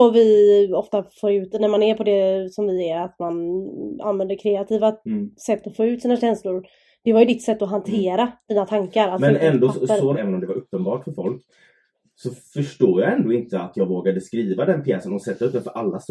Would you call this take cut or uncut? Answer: cut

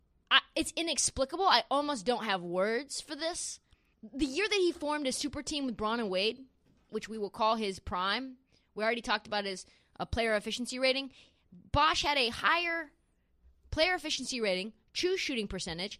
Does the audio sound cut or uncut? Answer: cut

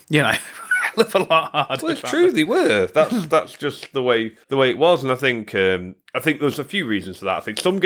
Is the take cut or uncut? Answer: cut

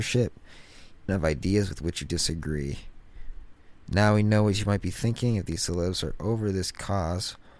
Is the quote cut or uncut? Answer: cut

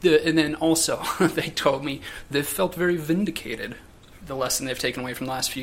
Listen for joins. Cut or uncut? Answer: uncut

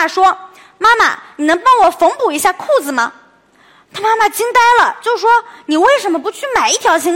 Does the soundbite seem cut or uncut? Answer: uncut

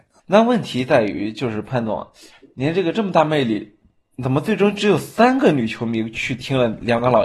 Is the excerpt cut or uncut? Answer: uncut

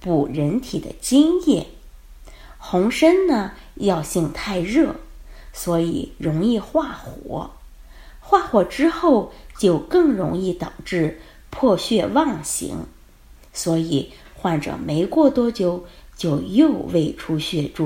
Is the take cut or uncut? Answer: uncut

